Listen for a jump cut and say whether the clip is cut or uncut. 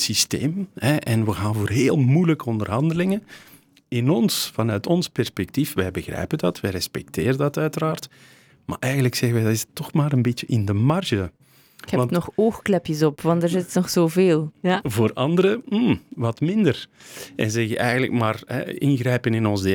cut